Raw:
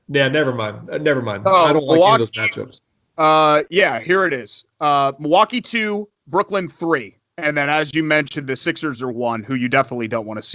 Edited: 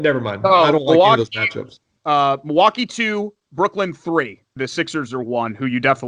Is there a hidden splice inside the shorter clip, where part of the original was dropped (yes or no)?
yes